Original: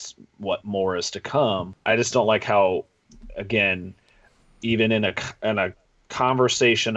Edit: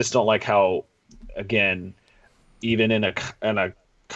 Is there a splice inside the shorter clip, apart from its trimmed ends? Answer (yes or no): no